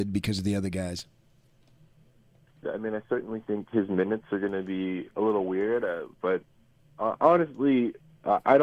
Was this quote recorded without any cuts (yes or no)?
no